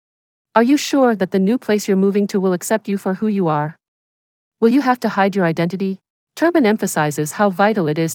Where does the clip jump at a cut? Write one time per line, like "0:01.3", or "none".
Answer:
0:06.2